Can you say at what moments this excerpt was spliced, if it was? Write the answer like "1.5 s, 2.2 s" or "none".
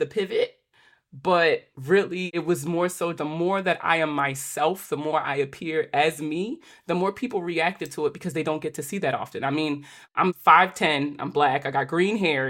3.2 s